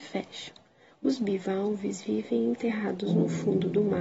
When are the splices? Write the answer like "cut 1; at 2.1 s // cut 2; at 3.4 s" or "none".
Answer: cut 1; at 0.9 s

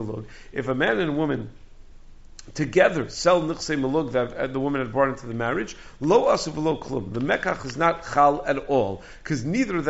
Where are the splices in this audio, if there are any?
none

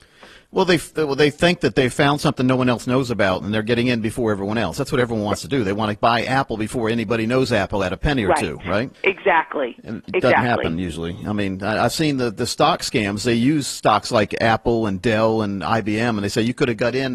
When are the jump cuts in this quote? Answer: cut 1; at 8.9 s

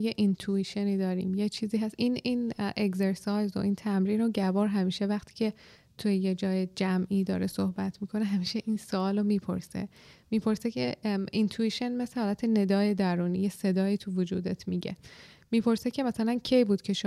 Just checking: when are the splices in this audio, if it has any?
none

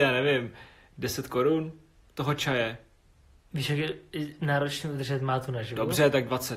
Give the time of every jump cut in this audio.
none

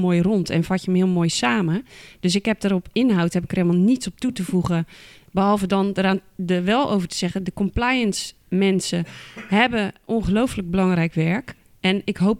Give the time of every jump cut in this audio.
none

